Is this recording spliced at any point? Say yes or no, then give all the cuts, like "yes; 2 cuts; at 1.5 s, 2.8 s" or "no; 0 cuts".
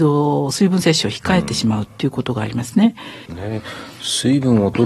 yes; 1 cut; at 3.3 s